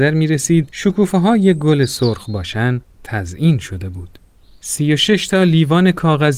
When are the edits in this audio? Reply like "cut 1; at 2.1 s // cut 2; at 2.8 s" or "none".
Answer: none